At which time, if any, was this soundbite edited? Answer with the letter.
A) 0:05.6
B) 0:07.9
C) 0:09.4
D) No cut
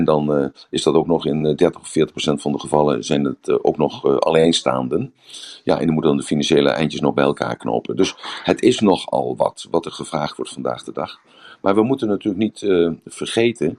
D